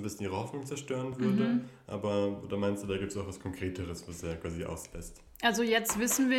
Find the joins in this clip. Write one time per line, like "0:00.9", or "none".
none